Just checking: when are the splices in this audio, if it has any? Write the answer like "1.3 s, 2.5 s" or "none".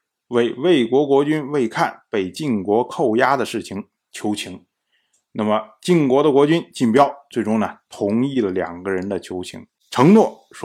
none